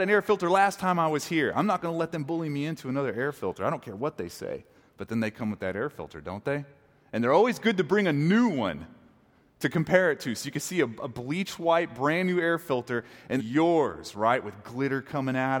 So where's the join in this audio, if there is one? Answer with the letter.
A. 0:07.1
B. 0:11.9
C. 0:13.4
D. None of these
C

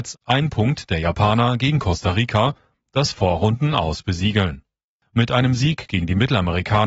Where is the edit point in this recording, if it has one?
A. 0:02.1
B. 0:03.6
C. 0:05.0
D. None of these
C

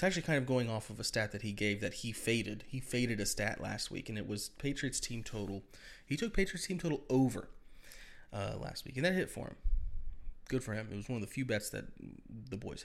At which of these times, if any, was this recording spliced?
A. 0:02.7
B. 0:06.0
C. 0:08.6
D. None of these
D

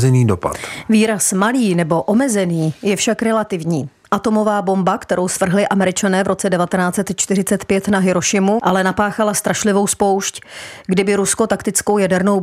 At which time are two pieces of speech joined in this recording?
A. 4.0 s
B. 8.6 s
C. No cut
B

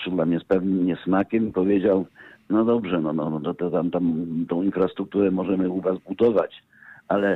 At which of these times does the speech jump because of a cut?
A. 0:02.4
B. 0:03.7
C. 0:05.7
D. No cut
D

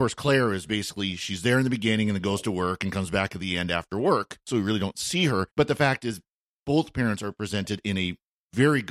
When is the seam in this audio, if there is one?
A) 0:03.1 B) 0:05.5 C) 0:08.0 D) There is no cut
B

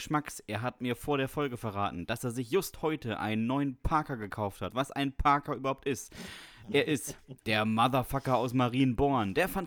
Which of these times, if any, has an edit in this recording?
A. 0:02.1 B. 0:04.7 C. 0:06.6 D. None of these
B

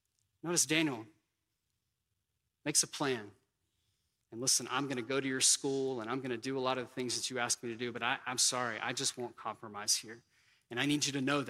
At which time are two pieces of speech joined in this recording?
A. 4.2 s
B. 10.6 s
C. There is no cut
A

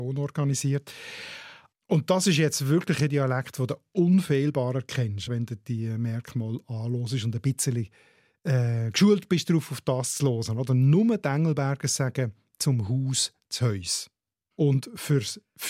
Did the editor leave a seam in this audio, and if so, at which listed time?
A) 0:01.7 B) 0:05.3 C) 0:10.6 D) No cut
D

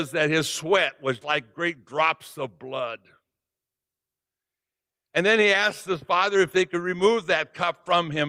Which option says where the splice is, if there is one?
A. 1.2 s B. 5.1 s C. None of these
A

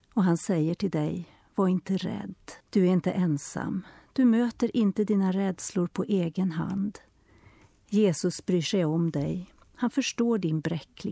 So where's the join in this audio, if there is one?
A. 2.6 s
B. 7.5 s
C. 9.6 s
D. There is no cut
A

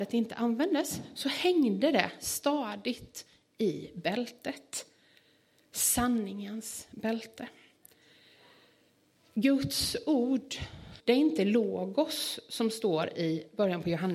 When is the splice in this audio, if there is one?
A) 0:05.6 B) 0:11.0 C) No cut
B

